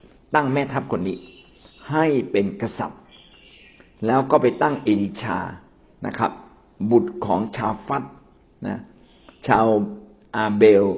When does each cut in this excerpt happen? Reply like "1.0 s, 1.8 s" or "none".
none

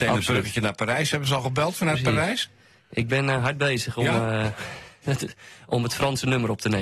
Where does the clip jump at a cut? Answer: none

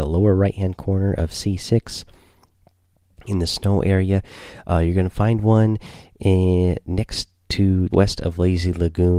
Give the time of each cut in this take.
7.9 s

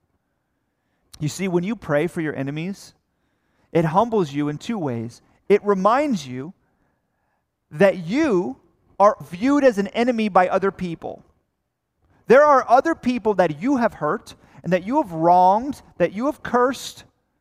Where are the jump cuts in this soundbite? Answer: 1.0 s, 9.2 s

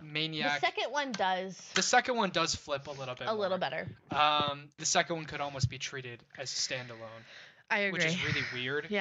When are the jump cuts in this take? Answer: 4.8 s

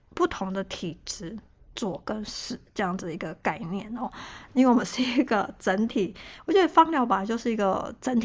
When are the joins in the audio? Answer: 1.6 s, 4.5 s

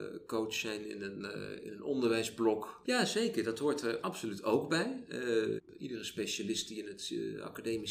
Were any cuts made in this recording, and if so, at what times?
2.8 s, 5.6 s

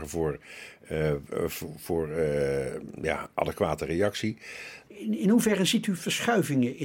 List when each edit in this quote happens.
4.9 s

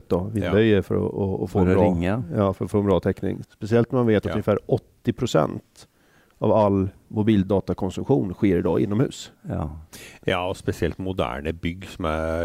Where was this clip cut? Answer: 3.4 s, 9.4 s

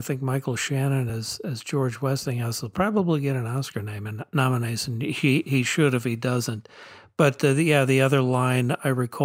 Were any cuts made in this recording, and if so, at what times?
none

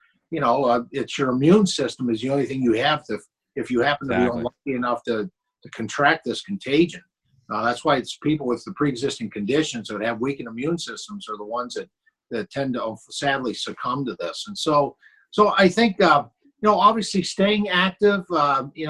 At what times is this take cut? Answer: none

